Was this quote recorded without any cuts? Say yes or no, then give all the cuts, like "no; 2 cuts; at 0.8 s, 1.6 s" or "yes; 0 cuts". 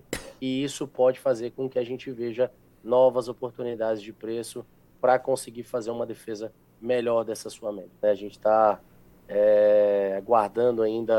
no; 1 cut; at 8.0 s